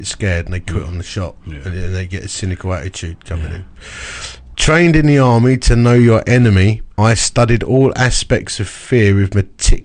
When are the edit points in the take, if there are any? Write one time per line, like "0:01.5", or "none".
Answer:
0:04.5
0:06.9